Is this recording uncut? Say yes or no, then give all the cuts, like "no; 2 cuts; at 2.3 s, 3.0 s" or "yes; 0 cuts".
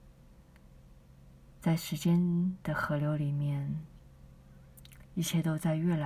yes; 0 cuts